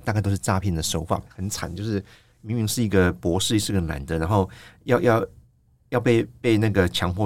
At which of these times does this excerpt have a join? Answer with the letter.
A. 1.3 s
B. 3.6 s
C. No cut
A